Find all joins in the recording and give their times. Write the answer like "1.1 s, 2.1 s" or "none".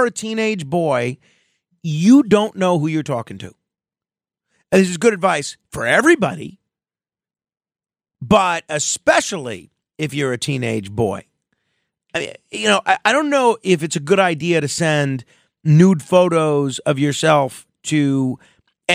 none

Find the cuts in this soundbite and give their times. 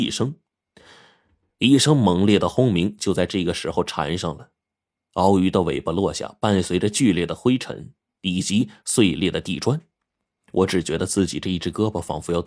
none

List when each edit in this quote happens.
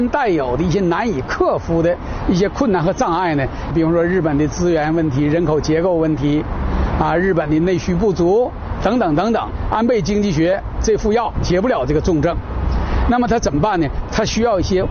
none

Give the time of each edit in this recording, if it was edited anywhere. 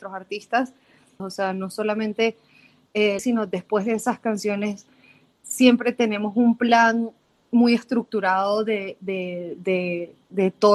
1.2 s, 3.2 s

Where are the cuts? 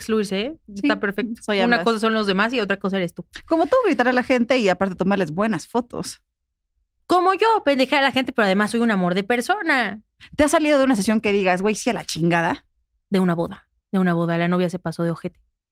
13.8 s

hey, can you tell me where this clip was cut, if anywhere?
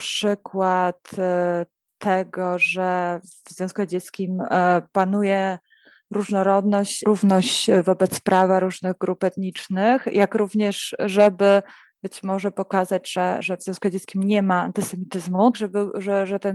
15.5 s

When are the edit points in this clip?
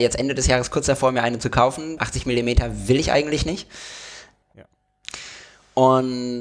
2.0 s, 4.4 s

